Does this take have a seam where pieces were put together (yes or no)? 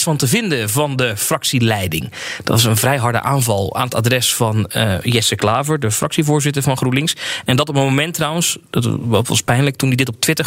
no